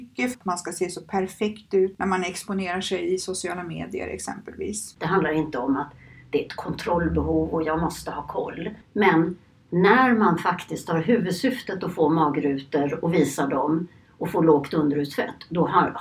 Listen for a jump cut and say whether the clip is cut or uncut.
cut